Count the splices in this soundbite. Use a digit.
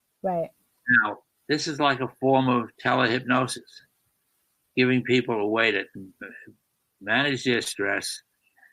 1